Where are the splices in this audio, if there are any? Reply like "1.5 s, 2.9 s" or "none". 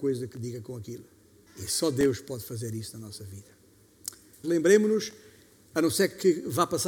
1.5 s, 4.4 s